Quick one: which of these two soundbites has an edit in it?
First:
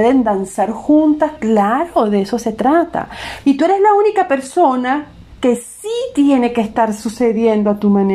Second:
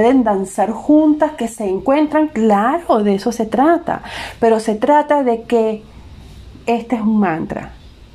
first; 2 cuts; at 1.4 s, 3.4 s

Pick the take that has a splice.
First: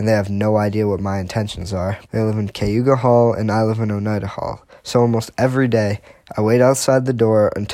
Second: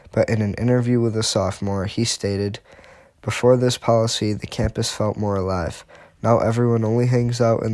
first; 2 cuts; at 2.0 s, 4.8 s

